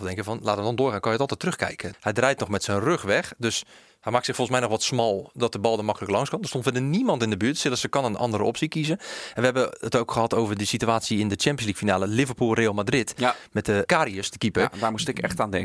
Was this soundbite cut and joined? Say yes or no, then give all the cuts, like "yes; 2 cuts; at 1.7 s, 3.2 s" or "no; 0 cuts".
yes; 2 cuts; at 1.9 s, 13.9 s